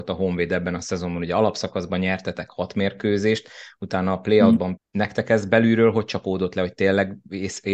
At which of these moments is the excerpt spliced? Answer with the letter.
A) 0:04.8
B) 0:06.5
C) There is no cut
A